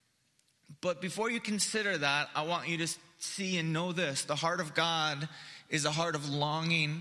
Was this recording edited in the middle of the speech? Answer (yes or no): no